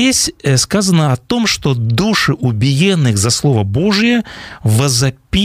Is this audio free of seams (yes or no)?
yes